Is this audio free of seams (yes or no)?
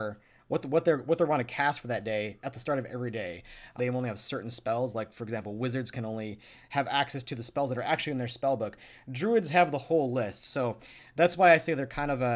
no